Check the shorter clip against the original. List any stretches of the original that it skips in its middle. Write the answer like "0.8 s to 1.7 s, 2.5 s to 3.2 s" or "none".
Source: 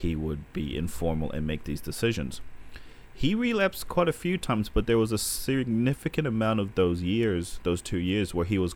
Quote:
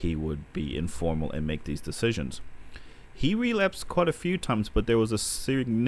none